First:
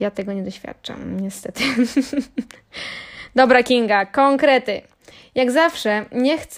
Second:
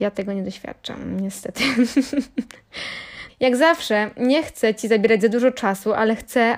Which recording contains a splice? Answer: second; 1 cut; at 3.3 s

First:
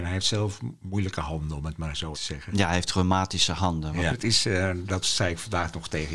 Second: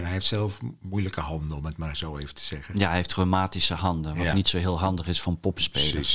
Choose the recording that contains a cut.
first; 2 cuts; at 2.1 s, 4.1 s

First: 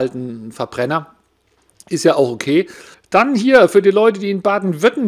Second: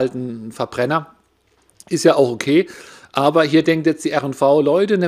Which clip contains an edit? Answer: first; 1 cut; at 2.9 s

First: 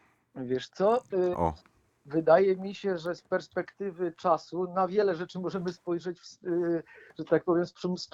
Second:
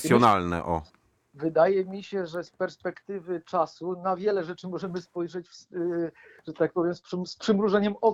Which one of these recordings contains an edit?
first; 1 cut; at 1.3 s

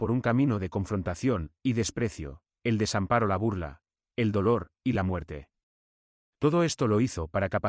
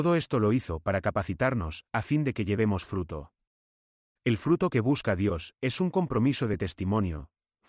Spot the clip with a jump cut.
first; 1 cut; at 2.5 s

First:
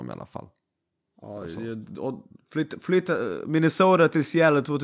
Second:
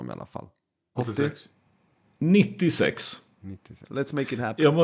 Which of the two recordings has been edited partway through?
second; 2 cuts; at 1.0 s, 3.8 s

